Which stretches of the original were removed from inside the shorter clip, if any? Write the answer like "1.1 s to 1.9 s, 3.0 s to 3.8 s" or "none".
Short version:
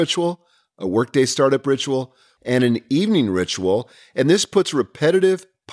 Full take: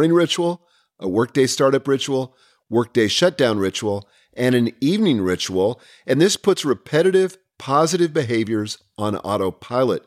2.6 s to 4.3 s